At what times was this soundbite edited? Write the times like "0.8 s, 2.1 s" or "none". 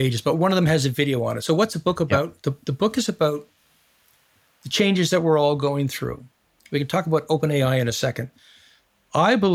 none